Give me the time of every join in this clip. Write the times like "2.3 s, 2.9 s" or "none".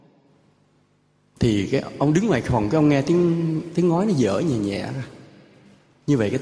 none